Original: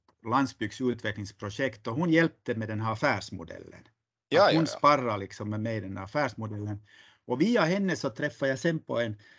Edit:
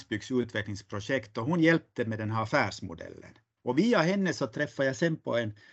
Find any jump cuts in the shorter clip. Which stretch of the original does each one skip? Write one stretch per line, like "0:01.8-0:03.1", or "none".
0:04.1-0:07.2